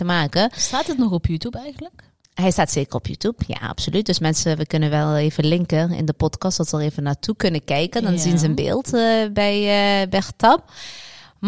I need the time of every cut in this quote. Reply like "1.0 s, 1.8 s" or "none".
none